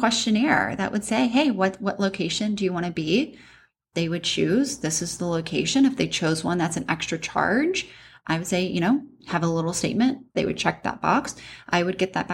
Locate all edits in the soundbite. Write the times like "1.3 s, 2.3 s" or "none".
10.3 s

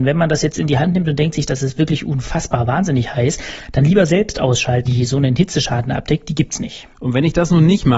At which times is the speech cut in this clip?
4.9 s

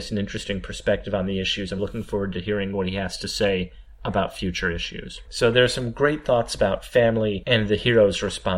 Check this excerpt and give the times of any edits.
1.8 s, 5.3 s

